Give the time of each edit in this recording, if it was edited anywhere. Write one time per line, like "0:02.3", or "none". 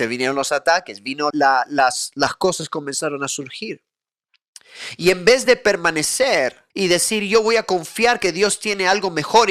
0:01.3
0:06.7

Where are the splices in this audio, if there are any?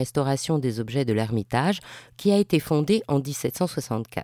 0:02.1

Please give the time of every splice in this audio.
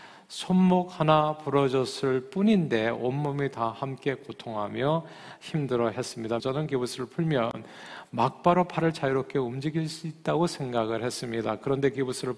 0:06.4

